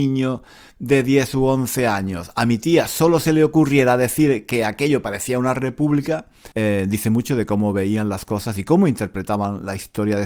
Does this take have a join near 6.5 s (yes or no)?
yes